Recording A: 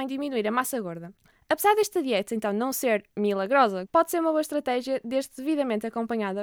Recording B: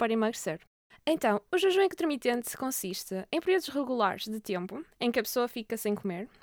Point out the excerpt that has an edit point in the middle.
A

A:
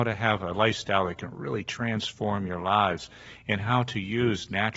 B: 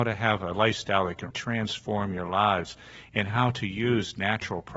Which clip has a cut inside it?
B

